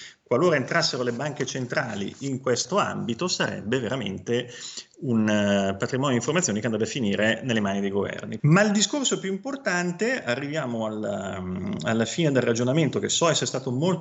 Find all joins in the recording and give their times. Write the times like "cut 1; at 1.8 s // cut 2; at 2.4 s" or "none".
cut 1; at 8.4 s